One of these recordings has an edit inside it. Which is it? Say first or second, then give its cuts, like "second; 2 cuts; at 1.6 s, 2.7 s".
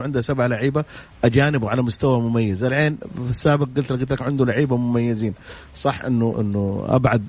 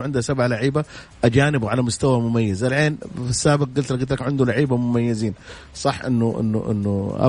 first; 1 cut; at 6.3 s